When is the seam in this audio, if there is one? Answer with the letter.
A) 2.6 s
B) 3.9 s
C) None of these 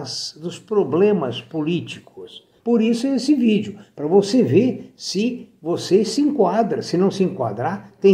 A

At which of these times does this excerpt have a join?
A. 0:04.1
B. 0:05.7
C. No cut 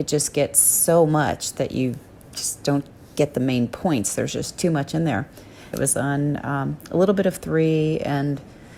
B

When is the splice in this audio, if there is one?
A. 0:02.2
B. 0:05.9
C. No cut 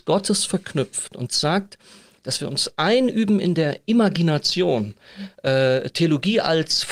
A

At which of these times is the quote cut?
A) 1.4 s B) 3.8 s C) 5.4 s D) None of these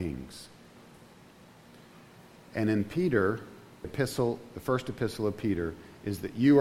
B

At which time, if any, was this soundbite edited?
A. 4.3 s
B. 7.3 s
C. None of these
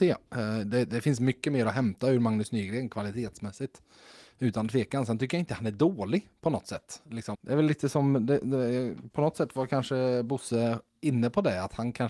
B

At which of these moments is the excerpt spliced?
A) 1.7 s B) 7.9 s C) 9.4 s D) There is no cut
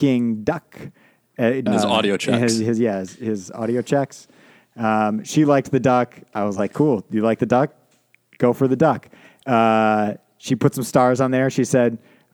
A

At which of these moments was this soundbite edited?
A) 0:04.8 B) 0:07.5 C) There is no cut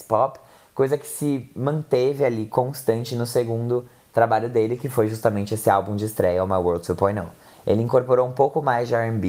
C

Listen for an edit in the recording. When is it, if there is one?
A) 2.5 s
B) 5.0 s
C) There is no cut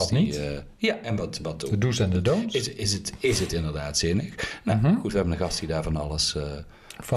C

